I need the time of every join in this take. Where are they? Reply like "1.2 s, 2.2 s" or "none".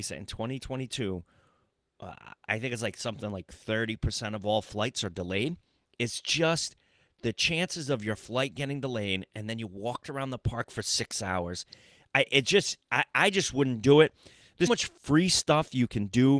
2.4 s, 14.7 s